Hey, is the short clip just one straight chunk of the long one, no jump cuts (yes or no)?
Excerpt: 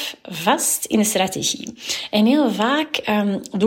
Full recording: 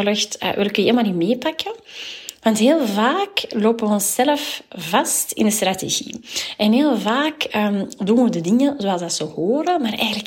yes